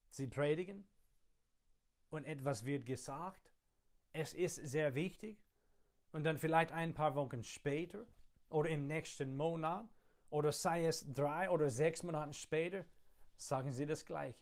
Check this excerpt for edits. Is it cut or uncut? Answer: uncut